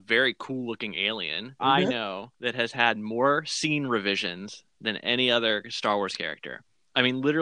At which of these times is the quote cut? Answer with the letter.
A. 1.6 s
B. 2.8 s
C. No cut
A